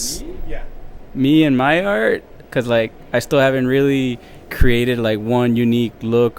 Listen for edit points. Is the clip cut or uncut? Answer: cut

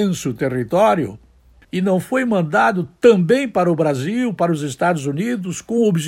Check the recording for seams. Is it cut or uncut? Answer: cut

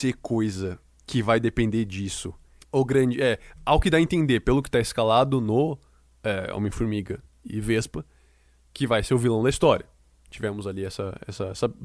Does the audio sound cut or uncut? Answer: uncut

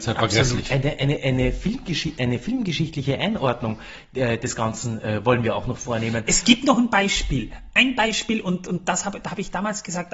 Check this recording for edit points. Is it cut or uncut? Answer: uncut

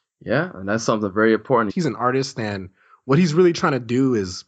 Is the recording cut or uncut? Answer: cut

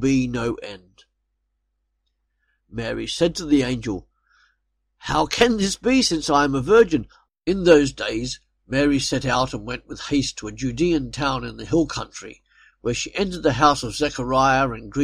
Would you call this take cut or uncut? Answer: cut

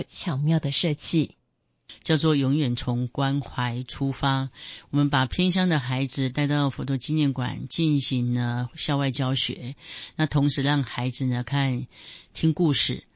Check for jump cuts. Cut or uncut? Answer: uncut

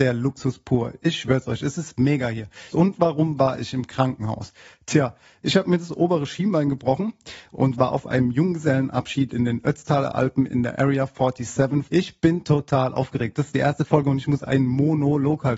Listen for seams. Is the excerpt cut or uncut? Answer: cut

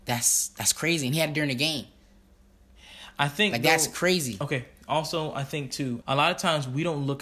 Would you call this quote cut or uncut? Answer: cut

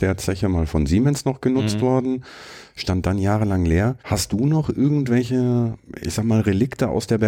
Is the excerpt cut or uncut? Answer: cut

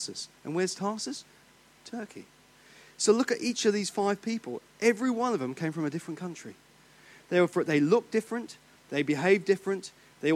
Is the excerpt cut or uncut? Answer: uncut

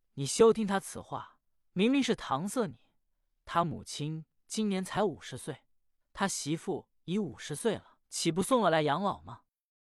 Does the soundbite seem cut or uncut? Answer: cut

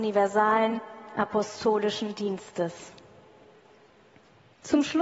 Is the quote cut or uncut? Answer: uncut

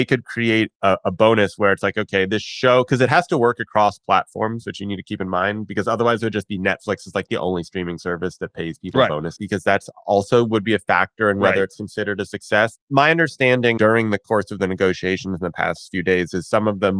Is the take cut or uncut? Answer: cut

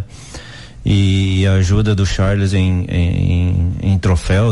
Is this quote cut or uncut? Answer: uncut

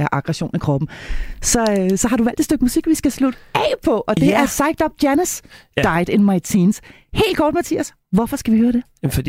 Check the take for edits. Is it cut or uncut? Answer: uncut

